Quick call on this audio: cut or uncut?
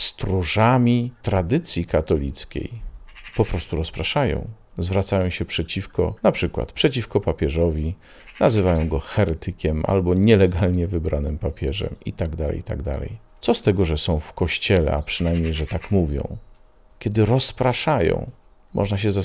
uncut